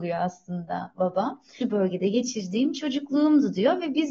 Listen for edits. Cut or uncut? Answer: cut